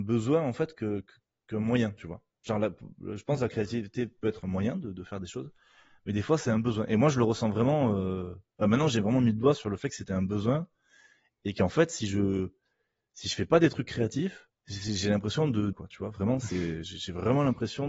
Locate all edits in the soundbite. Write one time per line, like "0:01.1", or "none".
0:14.6
0:15.7